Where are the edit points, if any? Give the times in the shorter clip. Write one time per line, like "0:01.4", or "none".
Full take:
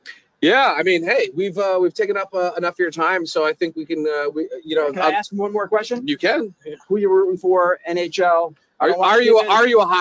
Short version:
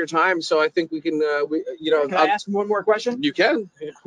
none